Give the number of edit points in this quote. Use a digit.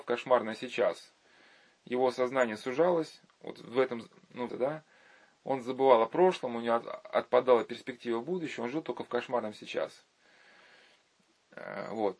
1